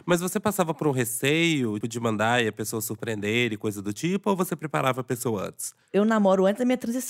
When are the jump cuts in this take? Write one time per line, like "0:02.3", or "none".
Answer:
0:01.8